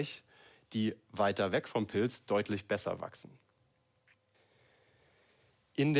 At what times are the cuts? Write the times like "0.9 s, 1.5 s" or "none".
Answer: none